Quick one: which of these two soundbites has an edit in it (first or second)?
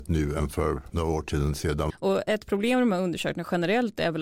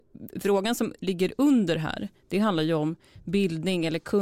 first